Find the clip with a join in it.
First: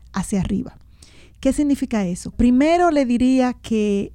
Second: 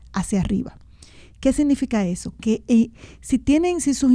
first; 1 cut; at 2.3 s

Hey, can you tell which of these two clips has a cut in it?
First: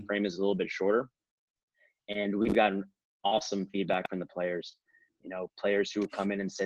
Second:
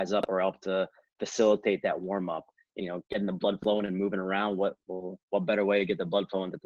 second; 1 cut; at 2.8 s

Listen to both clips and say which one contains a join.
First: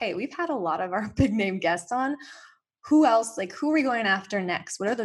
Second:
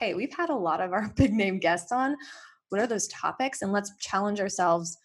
second; 1 cut; at 2.7 s

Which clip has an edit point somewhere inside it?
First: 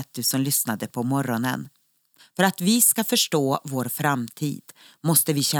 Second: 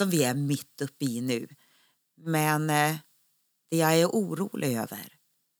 first; 1 cut; at 2.2 s

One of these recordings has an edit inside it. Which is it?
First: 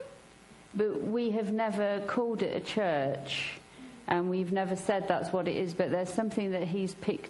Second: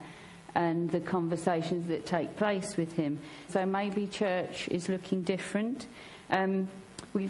second; 1 cut; at 3.5 s

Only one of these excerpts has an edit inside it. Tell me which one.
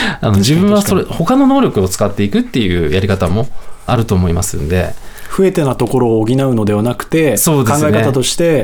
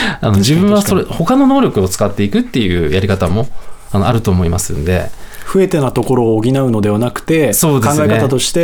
first; 1 cut; at 3.9 s

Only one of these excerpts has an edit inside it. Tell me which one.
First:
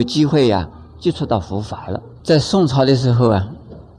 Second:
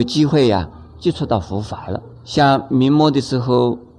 first; 1 cut; at 2.2 s

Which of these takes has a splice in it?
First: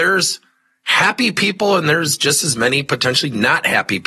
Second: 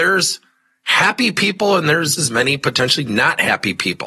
second; 1 cut; at 2.2 s

